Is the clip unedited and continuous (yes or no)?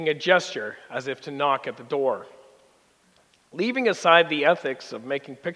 yes